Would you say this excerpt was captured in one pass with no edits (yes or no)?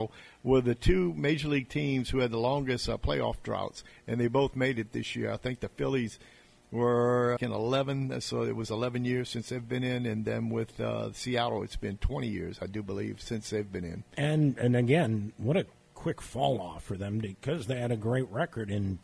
no